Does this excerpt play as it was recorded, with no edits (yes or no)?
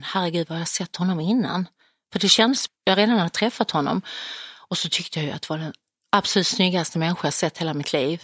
no